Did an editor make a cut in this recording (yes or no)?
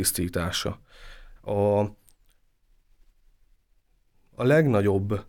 yes